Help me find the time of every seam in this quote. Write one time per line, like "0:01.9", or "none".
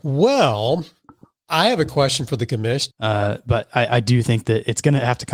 0:02.9